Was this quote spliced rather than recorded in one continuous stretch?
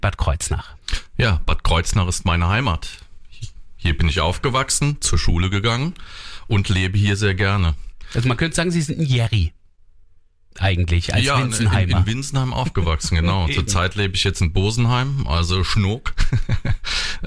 no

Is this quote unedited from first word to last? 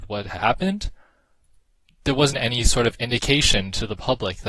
no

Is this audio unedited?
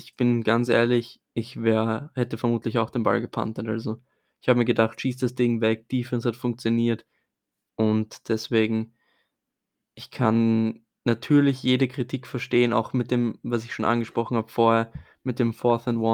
no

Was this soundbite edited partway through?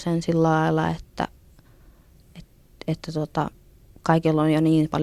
no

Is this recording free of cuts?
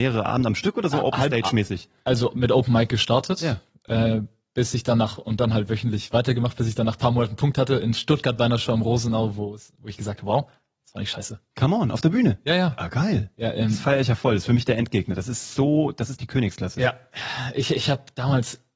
no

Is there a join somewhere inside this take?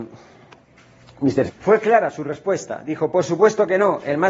yes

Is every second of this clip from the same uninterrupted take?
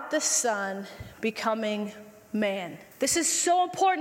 no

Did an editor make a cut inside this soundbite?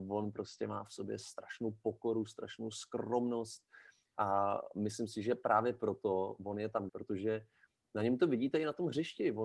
yes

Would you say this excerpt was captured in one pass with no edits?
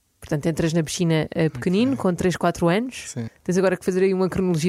no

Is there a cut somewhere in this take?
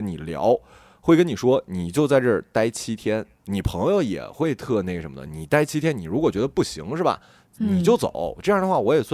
no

